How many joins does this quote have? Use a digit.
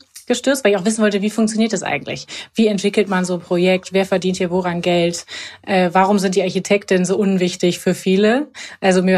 0